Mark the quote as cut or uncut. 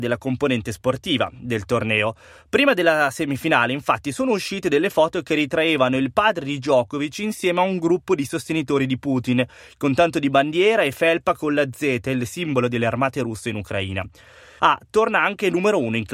cut